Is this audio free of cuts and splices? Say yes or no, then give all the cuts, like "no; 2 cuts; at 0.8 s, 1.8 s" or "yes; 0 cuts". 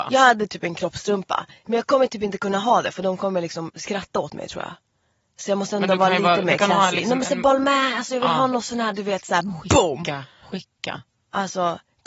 yes; 0 cuts